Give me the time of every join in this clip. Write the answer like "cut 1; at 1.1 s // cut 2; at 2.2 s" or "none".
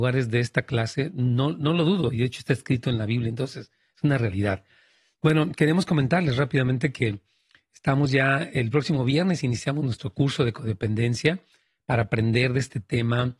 none